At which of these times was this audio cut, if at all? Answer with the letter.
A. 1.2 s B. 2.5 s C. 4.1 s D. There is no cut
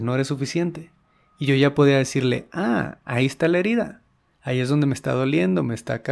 D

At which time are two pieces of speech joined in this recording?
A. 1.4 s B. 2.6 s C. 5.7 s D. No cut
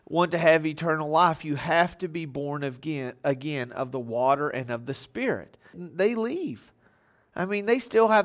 C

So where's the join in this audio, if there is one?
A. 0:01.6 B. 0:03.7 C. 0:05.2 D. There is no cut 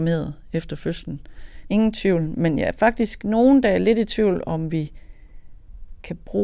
A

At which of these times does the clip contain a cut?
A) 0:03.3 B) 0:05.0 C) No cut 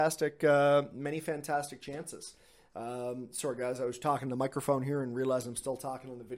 C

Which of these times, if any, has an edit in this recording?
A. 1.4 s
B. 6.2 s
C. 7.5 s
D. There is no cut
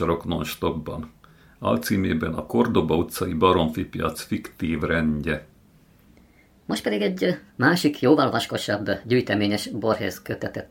C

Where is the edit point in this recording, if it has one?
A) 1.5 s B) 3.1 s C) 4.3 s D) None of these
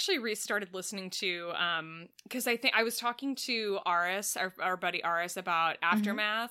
D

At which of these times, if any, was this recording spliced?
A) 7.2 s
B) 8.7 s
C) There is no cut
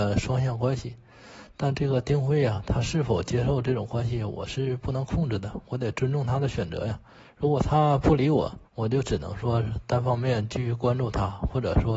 B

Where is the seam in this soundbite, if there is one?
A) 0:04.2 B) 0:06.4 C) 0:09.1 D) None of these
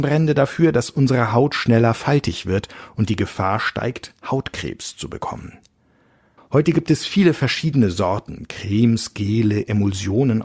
B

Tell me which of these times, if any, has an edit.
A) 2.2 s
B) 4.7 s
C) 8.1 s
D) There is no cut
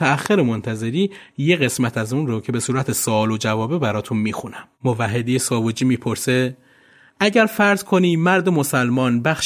B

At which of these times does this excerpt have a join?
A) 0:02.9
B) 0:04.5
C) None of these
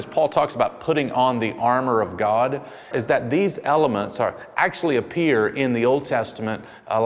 A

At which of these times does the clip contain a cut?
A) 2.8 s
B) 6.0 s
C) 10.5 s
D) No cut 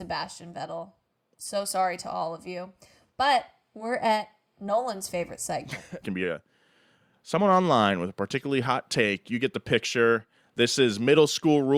B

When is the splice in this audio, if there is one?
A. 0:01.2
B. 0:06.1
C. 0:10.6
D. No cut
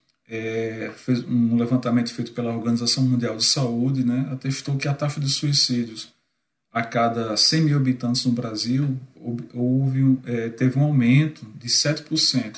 D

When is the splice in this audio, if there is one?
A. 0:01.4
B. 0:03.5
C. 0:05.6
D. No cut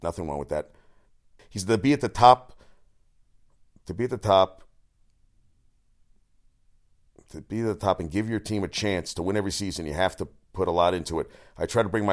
A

